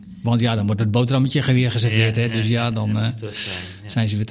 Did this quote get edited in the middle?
no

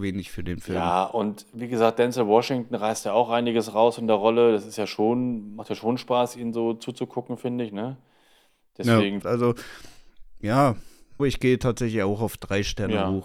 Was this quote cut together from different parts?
yes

